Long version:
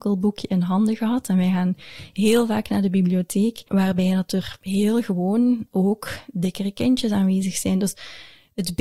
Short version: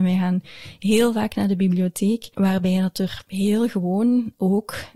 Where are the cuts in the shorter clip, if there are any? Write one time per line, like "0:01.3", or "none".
none